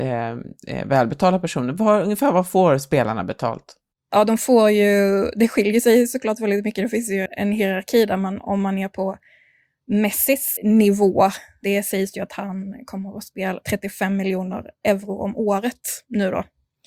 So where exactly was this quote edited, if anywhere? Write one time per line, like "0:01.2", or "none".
0:07.3
0:10.6
0:13.6